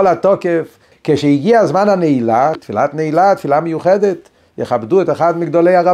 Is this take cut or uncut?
cut